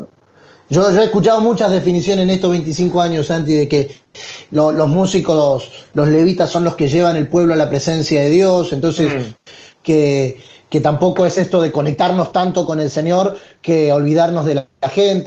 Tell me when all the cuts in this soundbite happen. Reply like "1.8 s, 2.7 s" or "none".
none

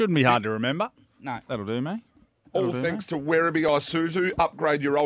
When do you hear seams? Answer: 1.4 s

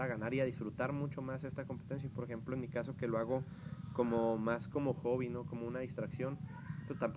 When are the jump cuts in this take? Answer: none

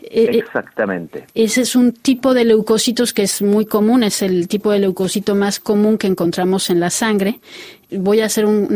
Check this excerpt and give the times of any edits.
none

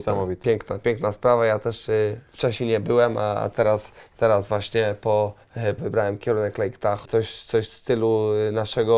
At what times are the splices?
5.8 s, 7.0 s

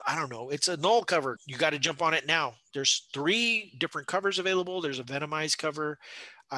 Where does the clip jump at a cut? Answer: 1.4 s, 2.7 s

